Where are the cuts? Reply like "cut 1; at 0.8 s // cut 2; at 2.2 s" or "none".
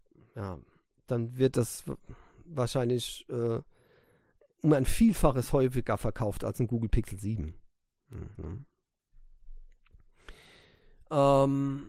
cut 1; at 8.4 s

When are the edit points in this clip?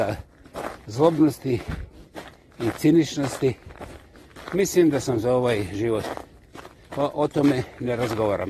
cut 1; at 6.8 s

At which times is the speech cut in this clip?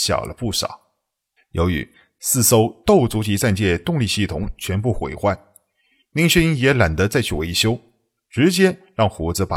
cut 1; at 1.4 s

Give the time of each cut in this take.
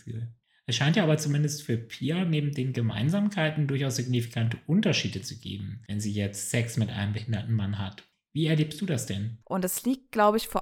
cut 1; at 9.4 s

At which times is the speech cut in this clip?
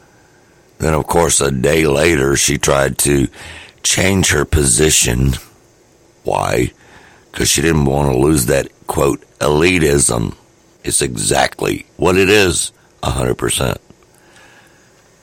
cut 1; at 10.8 s

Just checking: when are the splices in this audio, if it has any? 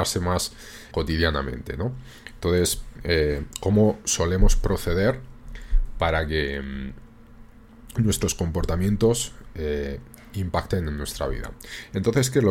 cut 1; at 0.9 s

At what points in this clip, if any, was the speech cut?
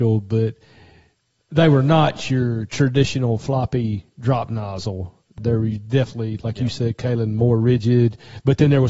none

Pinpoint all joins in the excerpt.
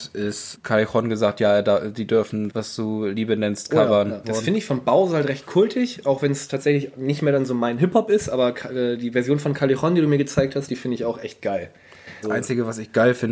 cut 1; at 2.5 s // cut 2; at 4.2 s // cut 3; at 12.2 s

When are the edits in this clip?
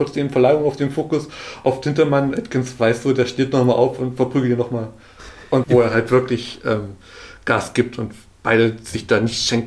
cut 1; at 5.6 s

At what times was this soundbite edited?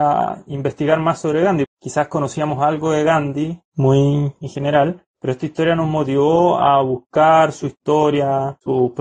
cut 1; at 1.6 s

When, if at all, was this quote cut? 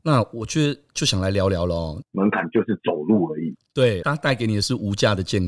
cut 1; at 2.0 s // cut 2; at 4.0 s

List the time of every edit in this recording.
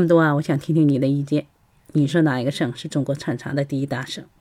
cut 1; at 2.1 s

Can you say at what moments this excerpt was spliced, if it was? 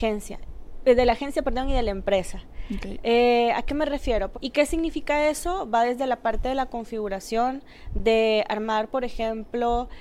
cut 1; at 4.3 s

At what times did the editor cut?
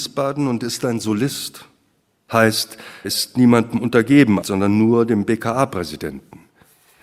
cut 1; at 3.0 s // cut 2; at 4.4 s

